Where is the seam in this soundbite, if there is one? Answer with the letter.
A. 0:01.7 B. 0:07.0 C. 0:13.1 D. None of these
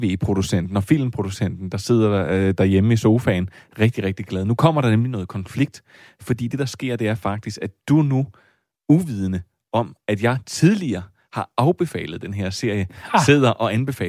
D